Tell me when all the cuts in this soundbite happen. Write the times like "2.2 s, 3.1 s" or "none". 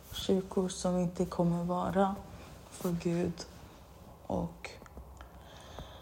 none